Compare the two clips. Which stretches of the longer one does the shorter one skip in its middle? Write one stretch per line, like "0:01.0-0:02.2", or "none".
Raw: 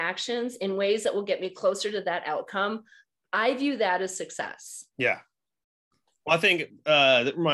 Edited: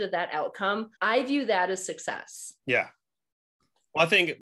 0:02.9-0:03.3